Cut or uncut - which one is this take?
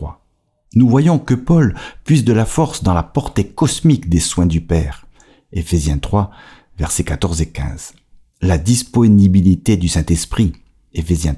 uncut